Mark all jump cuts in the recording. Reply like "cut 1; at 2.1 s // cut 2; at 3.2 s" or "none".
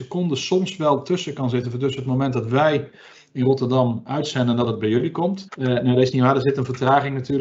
cut 1; at 5.5 s